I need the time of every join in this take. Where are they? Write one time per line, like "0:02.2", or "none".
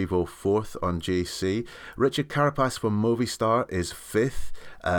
none